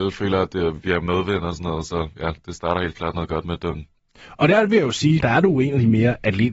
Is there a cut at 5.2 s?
yes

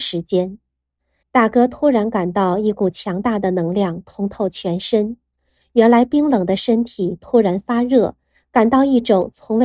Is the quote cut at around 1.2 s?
yes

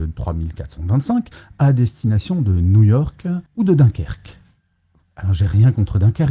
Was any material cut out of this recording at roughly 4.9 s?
no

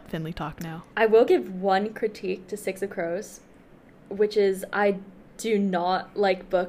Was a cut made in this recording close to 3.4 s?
no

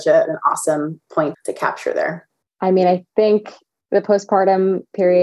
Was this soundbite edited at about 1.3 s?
yes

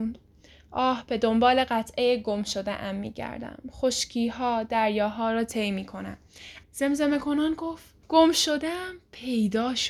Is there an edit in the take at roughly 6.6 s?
yes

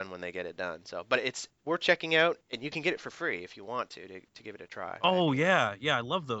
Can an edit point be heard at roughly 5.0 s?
yes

